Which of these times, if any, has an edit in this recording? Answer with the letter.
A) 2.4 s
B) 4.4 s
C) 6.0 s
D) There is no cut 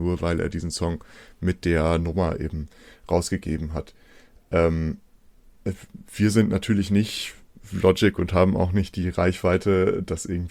D